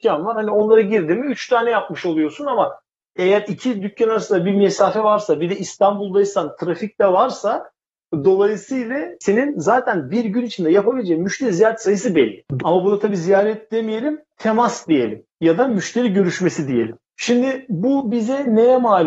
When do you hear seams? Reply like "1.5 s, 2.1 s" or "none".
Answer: 12.6 s